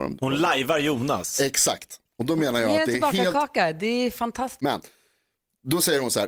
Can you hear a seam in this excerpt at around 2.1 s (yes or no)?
no